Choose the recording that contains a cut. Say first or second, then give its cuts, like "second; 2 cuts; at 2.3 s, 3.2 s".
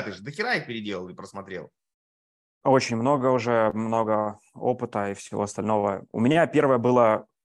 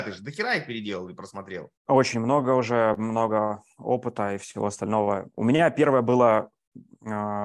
second; 1 cut; at 1.8 s